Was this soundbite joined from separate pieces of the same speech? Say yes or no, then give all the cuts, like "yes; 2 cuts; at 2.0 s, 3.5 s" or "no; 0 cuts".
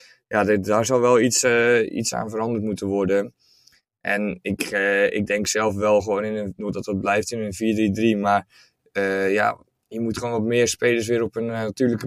no; 0 cuts